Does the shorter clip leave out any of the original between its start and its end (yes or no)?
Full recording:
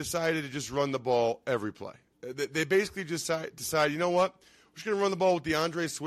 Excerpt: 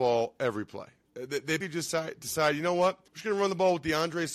yes